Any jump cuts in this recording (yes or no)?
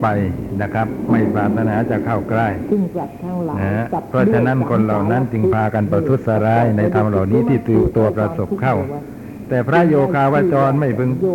yes